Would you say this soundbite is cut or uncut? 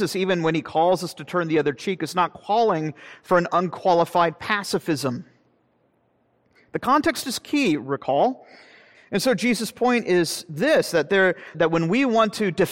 cut